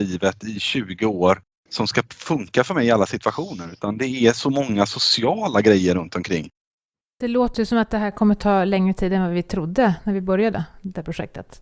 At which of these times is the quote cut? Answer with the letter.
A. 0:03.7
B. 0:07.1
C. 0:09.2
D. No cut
D